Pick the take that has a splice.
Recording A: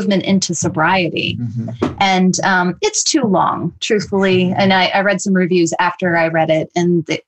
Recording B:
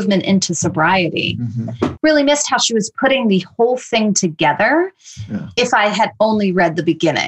B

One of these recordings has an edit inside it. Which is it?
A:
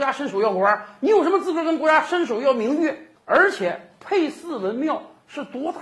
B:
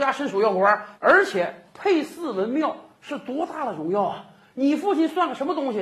B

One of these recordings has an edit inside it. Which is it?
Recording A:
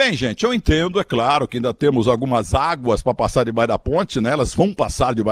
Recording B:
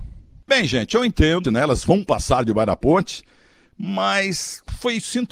B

